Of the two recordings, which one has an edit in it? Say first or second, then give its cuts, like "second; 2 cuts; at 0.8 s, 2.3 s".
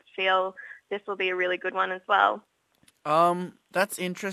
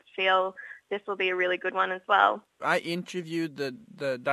second; 1 cut; at 2.6 s